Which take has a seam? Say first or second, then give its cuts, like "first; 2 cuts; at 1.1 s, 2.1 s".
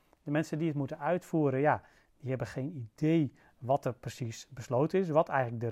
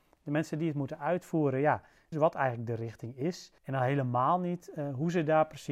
second; 2 cuts; at 2.1 s, 3.6 s